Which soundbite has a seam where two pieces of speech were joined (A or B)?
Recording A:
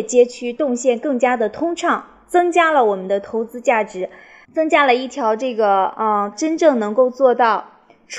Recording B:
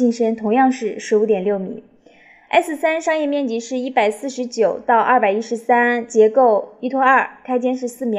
A